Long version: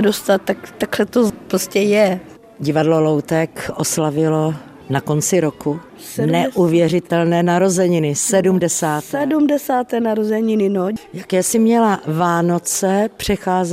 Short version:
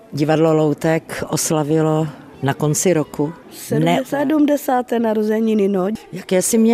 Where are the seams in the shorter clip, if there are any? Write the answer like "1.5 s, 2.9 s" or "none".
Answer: 4.0 s